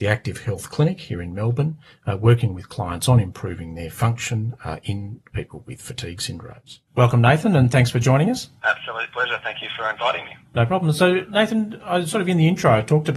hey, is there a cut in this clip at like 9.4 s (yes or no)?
no